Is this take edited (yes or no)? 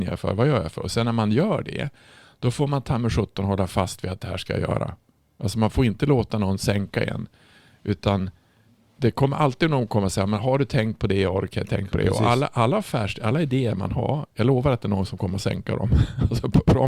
no